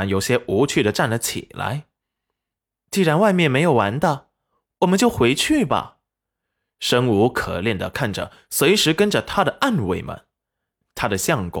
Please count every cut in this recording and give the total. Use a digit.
0